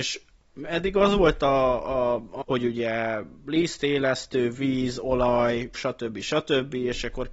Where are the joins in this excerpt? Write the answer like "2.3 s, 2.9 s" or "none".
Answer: 2.4 s, 5.7 s

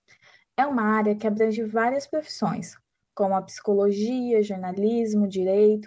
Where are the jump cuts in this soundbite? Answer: none

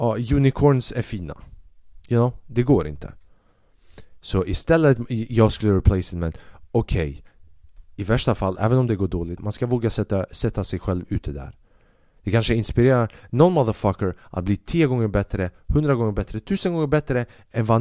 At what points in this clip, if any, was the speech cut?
9.4 s

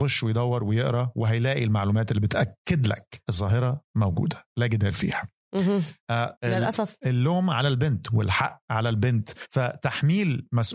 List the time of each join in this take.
6.4 s

